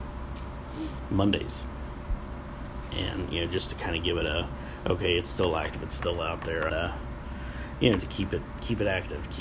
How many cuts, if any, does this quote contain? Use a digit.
2